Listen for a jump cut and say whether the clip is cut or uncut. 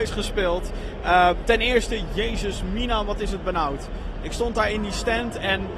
uncut